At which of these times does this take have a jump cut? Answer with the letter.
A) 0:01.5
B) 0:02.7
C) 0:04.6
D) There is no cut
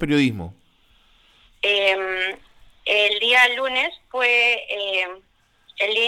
A